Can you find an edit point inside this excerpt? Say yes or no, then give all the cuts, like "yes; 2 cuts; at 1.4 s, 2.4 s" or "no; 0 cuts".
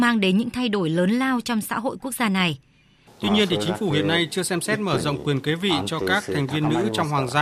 yes; 1 cut; at 3.1 s